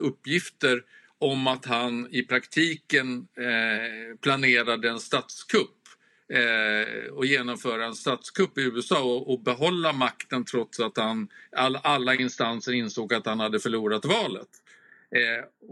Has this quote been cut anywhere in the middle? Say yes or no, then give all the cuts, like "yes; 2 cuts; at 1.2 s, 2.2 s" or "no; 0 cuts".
no; 0 cuts